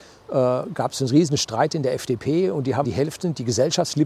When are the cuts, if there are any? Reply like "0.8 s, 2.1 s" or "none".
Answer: 2.8 s